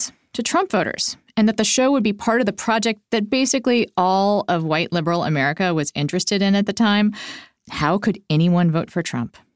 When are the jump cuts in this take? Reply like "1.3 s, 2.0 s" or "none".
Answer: 7.6 s

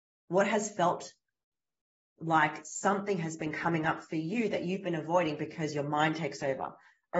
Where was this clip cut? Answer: none

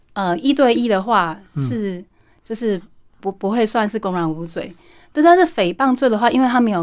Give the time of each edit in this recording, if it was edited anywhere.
none

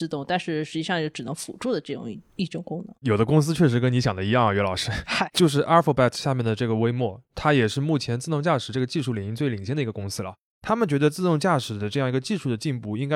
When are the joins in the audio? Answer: 10.5 s

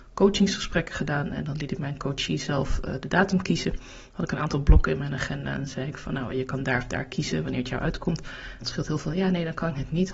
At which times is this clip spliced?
8.6 s

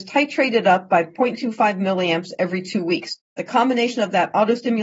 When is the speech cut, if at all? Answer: 3.3 s

